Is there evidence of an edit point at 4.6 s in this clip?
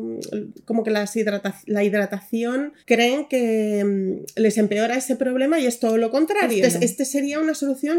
no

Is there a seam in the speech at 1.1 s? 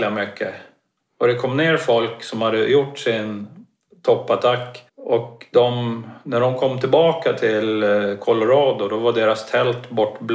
no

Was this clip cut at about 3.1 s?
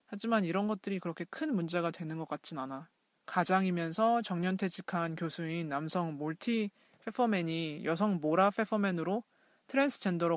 yes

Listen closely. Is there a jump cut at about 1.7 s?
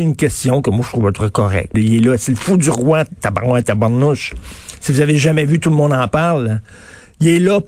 yes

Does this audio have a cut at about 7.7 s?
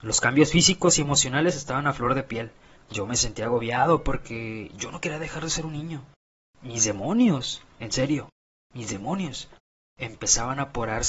yes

